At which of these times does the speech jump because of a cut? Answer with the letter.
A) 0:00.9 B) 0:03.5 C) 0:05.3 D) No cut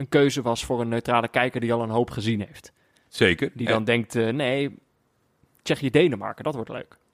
D